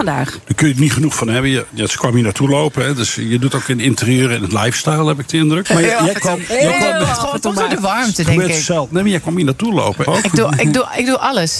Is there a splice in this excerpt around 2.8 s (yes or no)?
no